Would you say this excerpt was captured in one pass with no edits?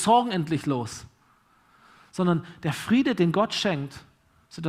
yes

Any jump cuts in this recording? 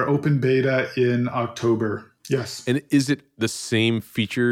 yes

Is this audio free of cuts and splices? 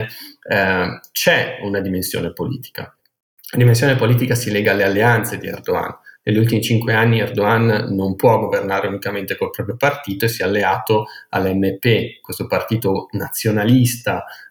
yes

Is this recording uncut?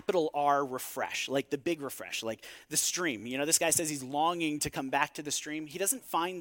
yes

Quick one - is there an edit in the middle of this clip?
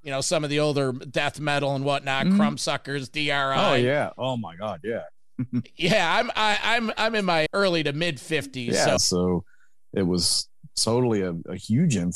yes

